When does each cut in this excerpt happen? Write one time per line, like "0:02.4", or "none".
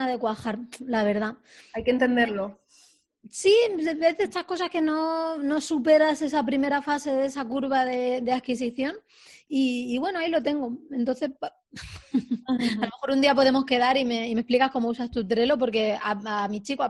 none